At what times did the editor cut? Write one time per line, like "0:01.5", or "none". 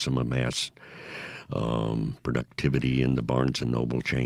none